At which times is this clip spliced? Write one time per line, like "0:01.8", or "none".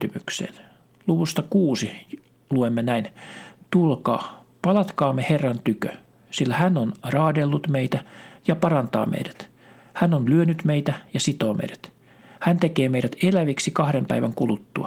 none